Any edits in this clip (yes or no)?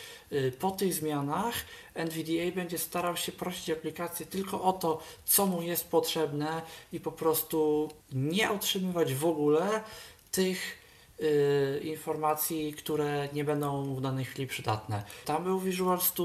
yes